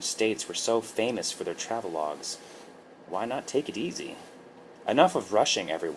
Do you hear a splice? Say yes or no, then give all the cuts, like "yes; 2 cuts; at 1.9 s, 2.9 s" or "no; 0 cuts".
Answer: no; 0 cuts